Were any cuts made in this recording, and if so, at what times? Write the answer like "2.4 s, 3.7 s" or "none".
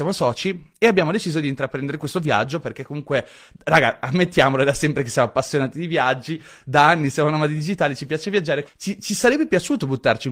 8.7 s